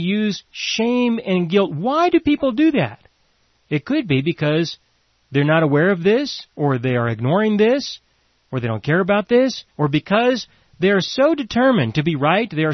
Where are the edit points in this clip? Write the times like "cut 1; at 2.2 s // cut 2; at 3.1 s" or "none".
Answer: cut 1; at 9.7 s